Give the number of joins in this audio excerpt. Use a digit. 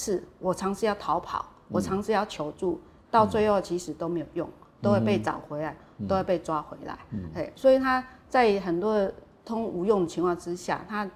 0